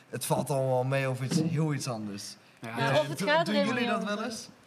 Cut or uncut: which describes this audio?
uncut